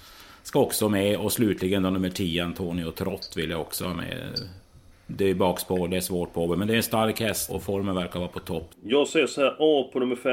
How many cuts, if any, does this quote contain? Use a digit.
2